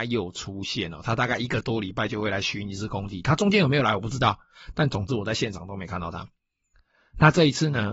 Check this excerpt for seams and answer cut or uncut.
uncut